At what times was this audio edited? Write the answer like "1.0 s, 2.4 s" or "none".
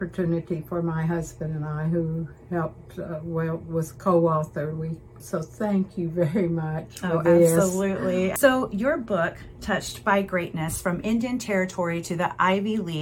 5.2 s